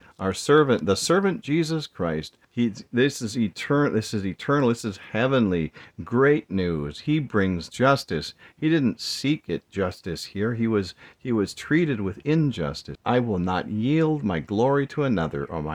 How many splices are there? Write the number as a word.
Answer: two